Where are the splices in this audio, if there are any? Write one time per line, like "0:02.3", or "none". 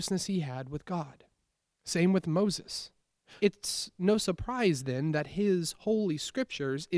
0:03.4